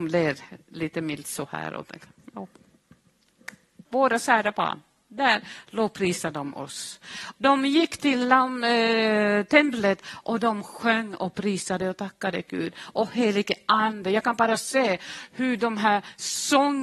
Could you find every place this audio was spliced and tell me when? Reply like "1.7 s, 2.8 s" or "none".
7.4 s